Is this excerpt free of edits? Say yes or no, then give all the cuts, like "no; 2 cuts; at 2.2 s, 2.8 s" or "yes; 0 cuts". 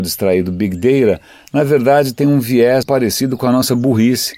no; 1 cut; at 2.8 s